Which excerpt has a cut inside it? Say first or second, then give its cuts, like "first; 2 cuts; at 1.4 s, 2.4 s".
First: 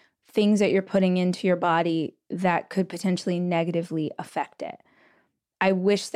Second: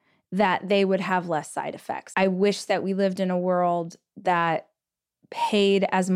second; 1 cut; at 2.1 s